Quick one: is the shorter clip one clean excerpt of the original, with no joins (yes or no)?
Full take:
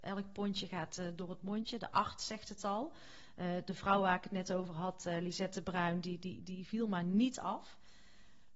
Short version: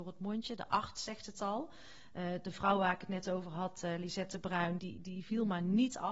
no